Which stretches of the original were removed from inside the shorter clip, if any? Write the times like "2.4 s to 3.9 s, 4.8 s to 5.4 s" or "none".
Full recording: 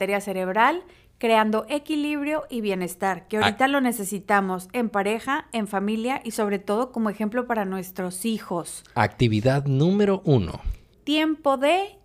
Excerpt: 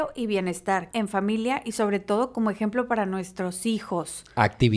3.3 s to 5.5 s